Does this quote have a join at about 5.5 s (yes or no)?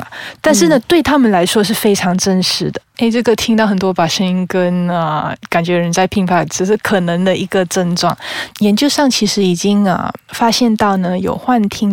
no